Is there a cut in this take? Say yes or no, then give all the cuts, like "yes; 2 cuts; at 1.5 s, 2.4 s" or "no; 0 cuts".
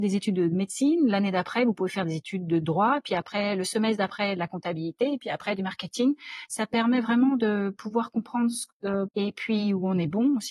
yes; 2 cuts; at 6.5 s, 9.1 s